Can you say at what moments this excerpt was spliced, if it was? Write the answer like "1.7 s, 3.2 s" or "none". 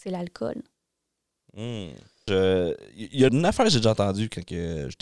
2.3 s, 3.3 s